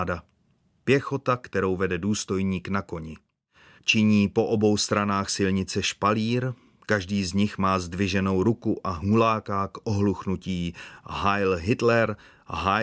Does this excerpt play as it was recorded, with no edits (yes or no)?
no